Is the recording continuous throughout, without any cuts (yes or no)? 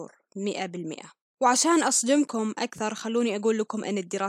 yes